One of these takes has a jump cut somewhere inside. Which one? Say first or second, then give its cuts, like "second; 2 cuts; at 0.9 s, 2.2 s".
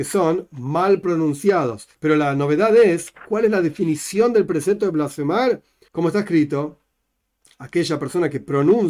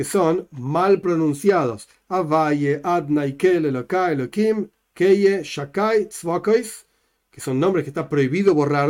first; 2 cuts; at 1.9 s, 5.9 s